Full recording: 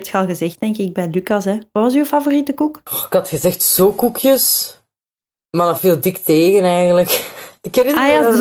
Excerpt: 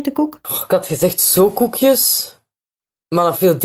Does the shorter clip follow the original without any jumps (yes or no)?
yes